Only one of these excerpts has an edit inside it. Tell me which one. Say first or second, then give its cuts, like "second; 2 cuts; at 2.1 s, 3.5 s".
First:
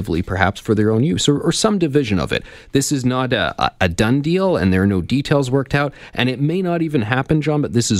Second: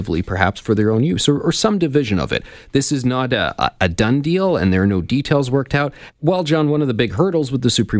second; 1 cut; at 6.1 s